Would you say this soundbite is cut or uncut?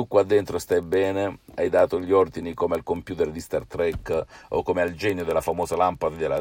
uncut